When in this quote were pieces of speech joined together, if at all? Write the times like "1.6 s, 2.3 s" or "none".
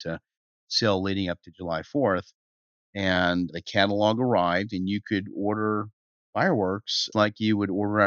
2.7 s, 7.1 s